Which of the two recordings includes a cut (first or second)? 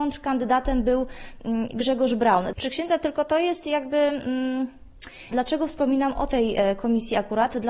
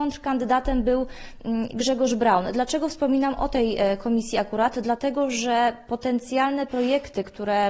first